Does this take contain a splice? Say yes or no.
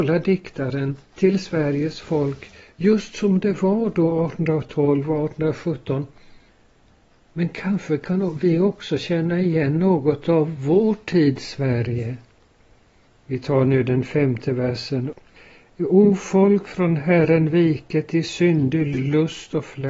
no